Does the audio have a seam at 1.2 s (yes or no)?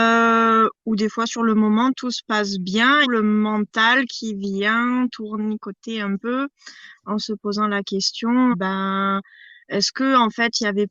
no